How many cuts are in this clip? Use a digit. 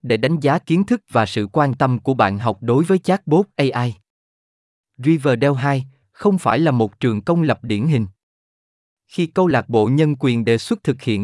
1